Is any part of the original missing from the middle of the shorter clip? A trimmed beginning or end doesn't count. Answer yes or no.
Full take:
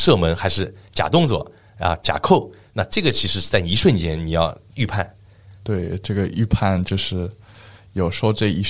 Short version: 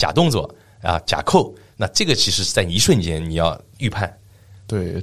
no